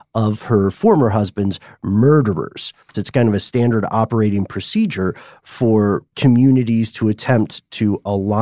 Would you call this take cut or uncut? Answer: cut